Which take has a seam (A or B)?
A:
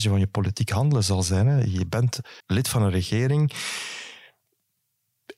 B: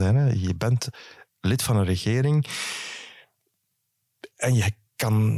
A